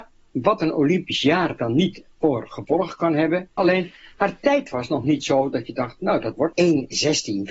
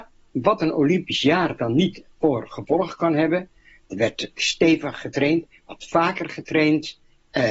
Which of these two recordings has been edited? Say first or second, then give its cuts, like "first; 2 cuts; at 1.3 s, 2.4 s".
first; 2 cuts; at 3.6 s, 6.5 s